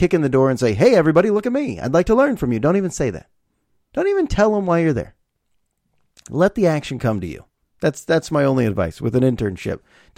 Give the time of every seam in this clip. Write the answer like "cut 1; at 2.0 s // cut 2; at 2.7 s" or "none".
none